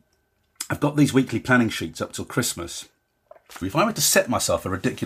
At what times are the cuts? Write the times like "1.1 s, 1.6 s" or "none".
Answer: 3.6 s